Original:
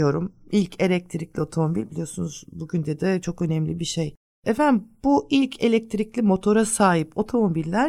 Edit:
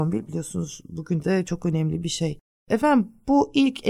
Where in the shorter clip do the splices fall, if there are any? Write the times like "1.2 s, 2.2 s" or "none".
1.2 s